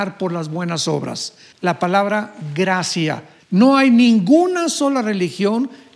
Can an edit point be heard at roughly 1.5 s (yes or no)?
yes